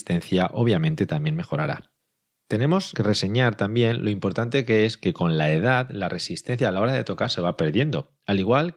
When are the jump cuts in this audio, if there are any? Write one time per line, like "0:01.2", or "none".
none

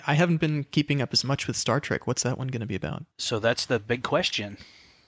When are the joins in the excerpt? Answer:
0:03.1

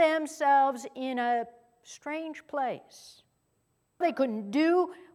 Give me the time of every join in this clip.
0:04.0

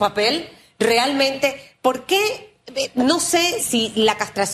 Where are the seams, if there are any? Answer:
0:03.6

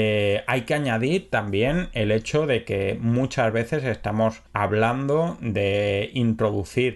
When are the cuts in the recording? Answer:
0:04.5

